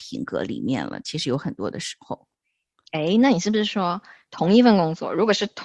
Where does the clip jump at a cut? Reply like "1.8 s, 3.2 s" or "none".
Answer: none